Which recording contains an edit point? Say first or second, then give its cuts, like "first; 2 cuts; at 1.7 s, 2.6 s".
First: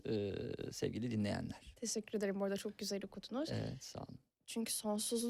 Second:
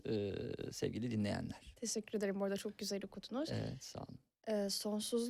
first; 1 cut; at 4.4 s